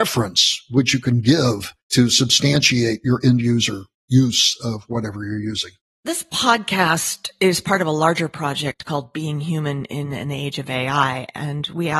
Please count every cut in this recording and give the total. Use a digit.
0